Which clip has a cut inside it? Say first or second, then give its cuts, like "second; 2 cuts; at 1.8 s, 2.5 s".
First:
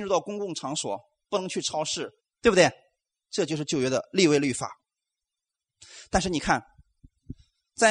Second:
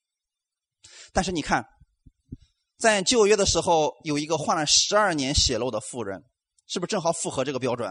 first; 1 cut; at 2.2 s